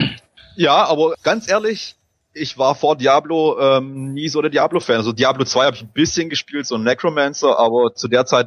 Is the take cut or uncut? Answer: cut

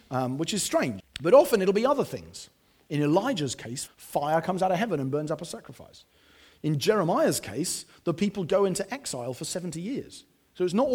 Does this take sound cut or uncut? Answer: cut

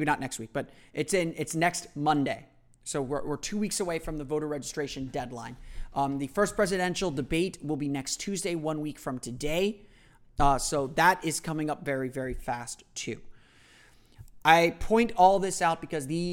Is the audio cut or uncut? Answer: uncut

